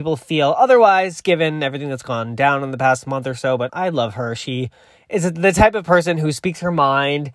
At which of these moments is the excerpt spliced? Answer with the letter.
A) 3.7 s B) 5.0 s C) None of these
A